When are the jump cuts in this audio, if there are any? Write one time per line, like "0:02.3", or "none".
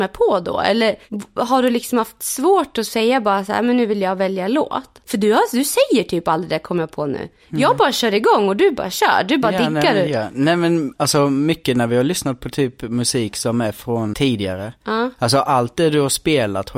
0:14.1